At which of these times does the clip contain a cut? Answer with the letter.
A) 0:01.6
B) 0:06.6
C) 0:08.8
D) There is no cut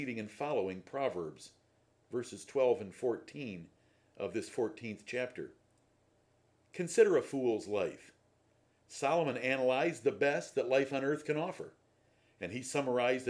D